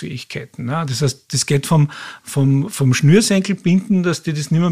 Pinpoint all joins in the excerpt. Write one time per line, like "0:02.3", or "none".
none